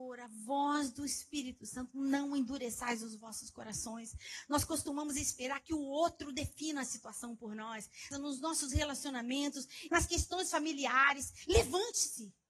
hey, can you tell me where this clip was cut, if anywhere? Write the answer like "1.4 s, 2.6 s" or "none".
8.1 s, 9.9 s

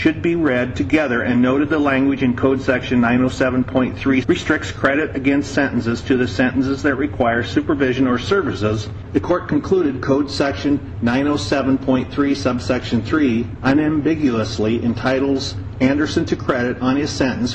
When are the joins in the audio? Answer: 4.2 s, 9.1 s

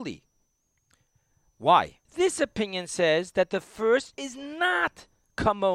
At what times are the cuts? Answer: 2.1 s, 4.1 s

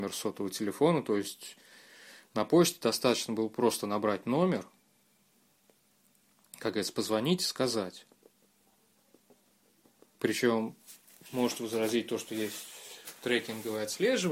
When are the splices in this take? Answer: none

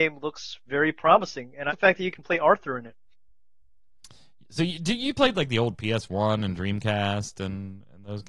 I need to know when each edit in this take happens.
1.7 s

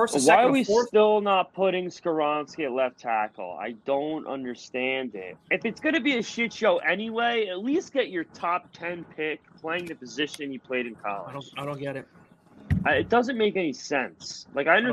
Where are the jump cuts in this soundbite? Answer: 5.4 s

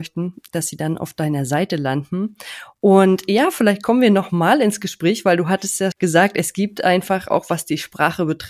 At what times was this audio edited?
5.9 s

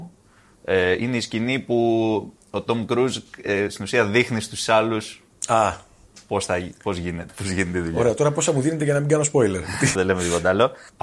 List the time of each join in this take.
7.3 s, 9.9 s

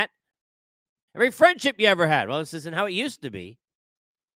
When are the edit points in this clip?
1.1 s

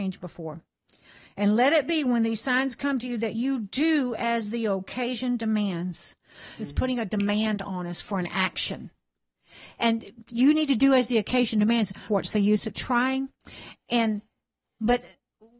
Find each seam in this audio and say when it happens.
6.6 s, 9.8 s, 12.1 s

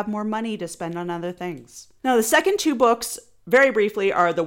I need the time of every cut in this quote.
2.0 s

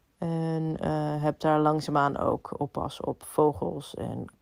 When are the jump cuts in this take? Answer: none

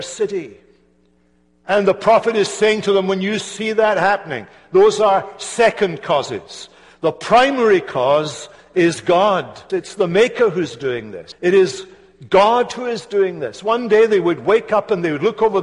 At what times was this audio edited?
9.7 s, 11.3 s

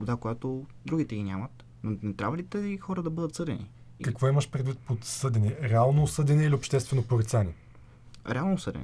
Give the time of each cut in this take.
4.0 s

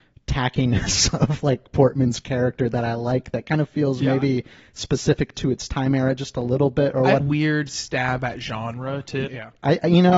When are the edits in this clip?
7.2 s, 9.3 s

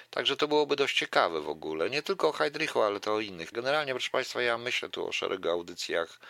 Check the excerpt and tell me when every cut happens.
3.5 s

